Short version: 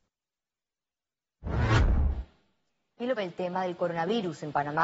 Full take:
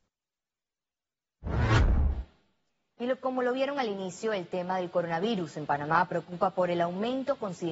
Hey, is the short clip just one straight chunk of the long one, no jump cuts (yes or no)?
no